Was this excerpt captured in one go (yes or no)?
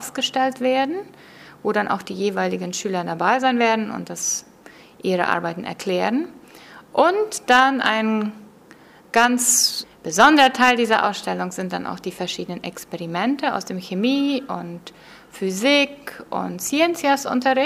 yes